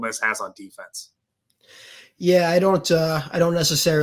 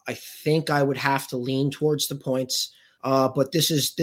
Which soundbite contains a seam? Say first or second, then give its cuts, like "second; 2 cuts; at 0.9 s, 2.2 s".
second; 1 cut; at 3.0 s